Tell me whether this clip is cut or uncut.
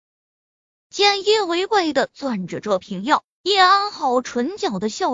cut